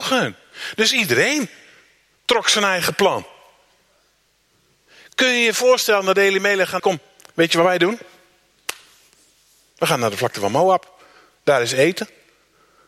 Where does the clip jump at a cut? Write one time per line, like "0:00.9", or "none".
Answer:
0:06.8